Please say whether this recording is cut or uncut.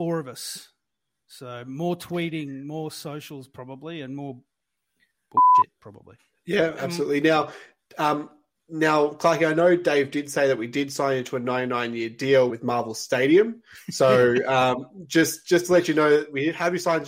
cut